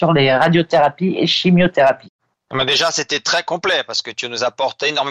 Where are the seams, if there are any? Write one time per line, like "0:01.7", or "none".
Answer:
none